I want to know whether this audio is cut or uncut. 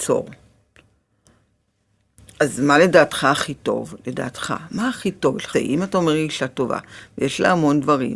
cut